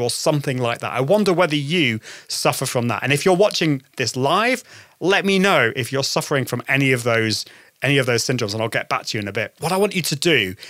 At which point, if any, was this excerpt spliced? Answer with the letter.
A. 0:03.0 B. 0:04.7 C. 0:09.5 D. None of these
D